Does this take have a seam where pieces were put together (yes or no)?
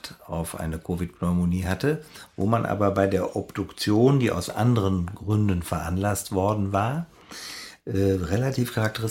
no